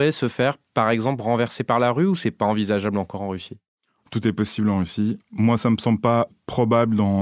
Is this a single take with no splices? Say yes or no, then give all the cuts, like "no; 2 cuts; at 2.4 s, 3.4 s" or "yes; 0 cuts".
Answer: yes; 0 cuts